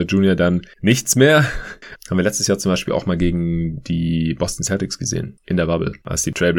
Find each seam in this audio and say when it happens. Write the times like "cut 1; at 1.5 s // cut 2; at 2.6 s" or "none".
cut 1; at 2.0 s